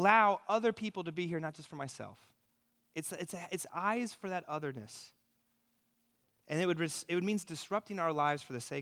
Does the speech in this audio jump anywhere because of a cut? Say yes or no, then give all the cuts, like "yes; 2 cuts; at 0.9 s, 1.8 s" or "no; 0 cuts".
no; 0 cuts